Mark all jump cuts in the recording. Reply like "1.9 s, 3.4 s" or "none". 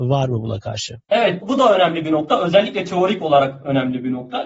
1.4 s